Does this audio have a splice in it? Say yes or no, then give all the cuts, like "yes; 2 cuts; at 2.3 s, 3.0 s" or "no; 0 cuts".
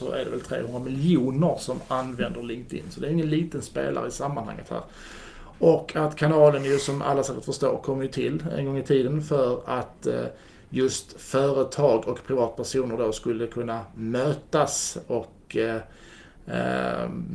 no; 0 cuts